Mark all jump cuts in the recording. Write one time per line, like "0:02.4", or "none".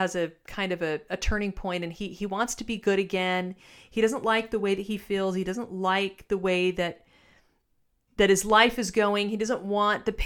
none

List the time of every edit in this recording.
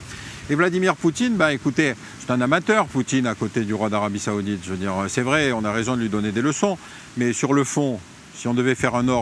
none

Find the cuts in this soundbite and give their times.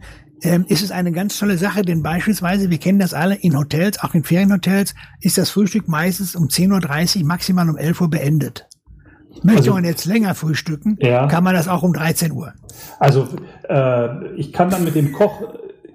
none

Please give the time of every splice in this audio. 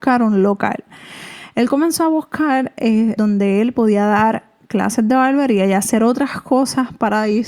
0:03.2

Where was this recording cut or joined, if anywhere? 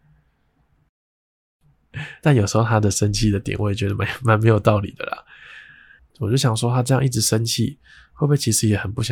0:06.0

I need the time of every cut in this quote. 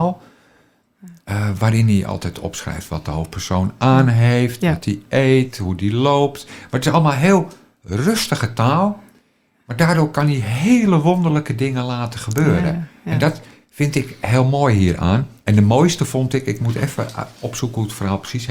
0:15.4

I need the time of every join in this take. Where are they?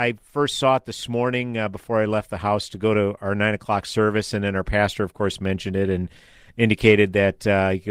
none

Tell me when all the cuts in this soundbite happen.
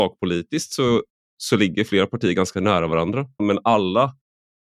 0:03.4

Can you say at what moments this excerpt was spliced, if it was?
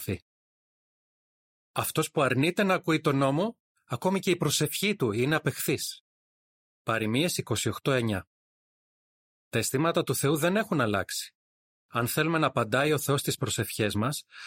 0:09.3

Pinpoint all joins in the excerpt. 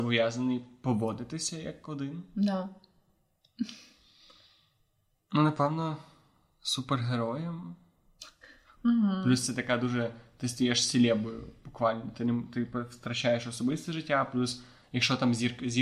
0:08.8

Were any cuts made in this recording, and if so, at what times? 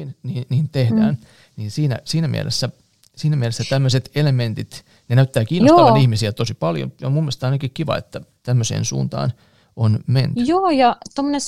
none

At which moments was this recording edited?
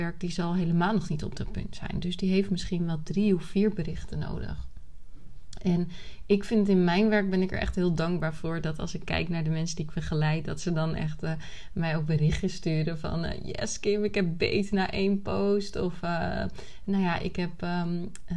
none

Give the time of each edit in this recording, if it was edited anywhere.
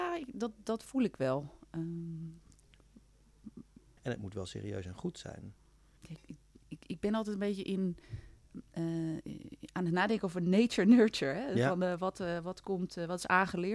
0:04.0
0:06.0

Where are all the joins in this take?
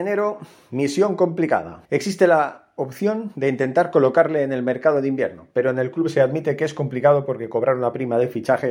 0:01.8

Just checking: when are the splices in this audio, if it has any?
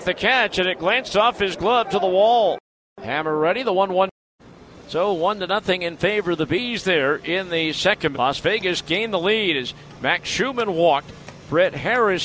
0:08.1

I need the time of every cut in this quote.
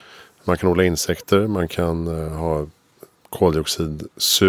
none

